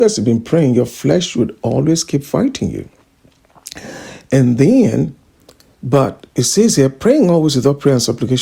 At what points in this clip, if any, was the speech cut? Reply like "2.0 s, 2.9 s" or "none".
none

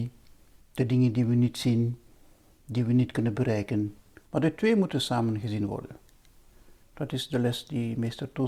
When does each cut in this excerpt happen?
4.2 s

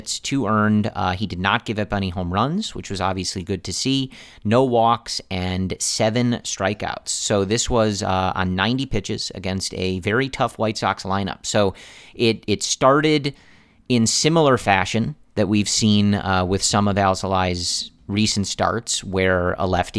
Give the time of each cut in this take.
12.4 s

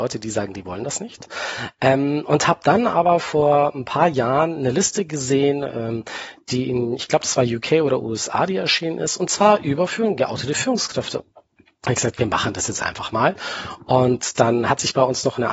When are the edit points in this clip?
11.2 s

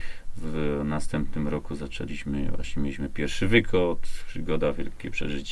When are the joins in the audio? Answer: none

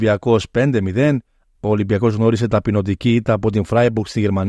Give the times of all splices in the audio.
1.6 s

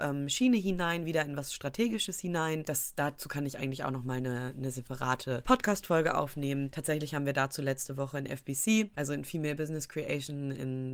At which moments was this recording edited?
none

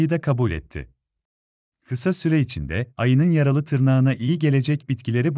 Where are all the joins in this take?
1.7 s

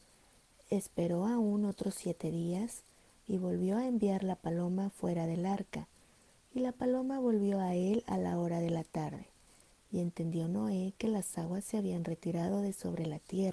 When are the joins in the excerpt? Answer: 9.8 s

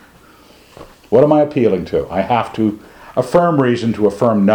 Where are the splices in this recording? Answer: none

